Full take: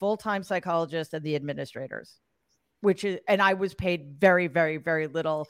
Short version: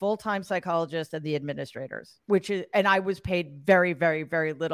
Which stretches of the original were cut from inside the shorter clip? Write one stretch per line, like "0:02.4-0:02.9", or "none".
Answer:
0:02.2-0:02.8